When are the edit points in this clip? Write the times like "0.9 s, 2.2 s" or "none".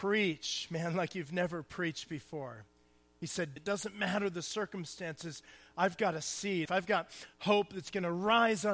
3.6 s, 6.7 s